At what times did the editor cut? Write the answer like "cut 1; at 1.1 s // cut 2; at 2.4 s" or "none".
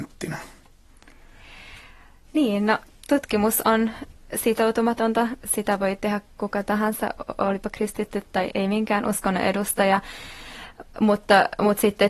cut 1; at 8.5 s